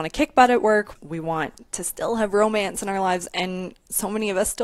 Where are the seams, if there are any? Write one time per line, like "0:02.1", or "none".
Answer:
0:01.0